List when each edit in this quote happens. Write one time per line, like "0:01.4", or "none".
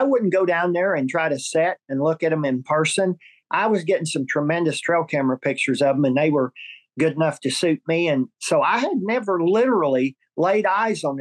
none